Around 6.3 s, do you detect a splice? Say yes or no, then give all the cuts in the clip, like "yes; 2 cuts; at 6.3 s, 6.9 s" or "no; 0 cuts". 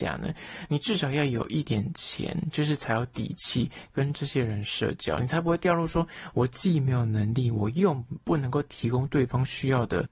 no; 1 cut; at 1.7 s